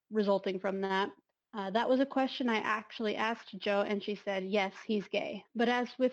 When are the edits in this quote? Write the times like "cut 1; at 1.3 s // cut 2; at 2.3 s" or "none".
none

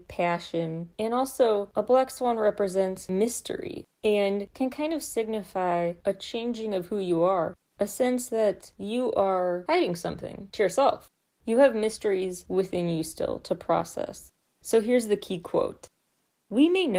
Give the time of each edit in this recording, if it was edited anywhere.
none

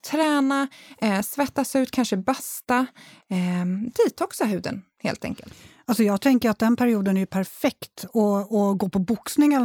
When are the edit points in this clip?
none

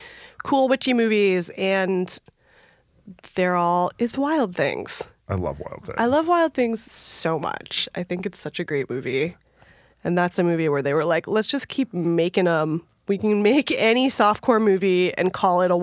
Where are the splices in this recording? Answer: cut 1; at 3.9 s

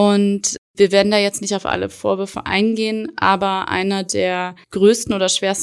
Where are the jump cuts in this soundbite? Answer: cut 1; at 4.6 s

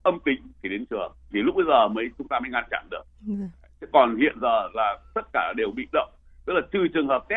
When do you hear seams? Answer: cut 1; at 1.3 s

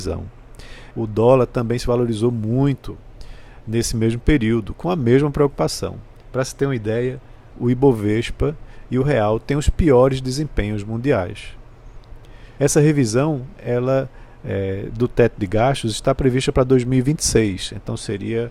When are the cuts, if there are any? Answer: cut 1; at 0.9 s // cut 2; at 7.5 s // cut 3; at 12.6 s

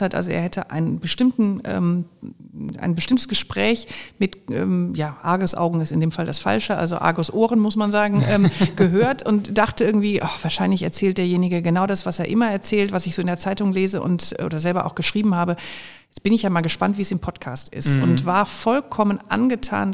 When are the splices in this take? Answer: none

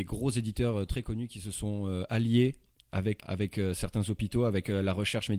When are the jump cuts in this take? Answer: cut 1; at 3.2 s

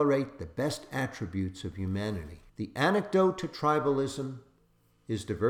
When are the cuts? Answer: cut 1; at 2.5 s

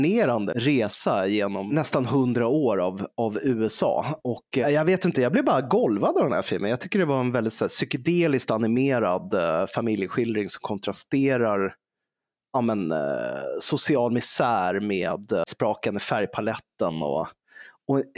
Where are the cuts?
none

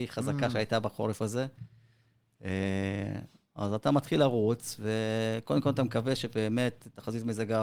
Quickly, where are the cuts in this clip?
none

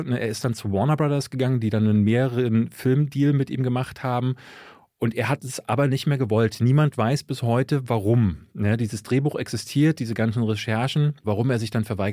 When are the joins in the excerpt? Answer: none

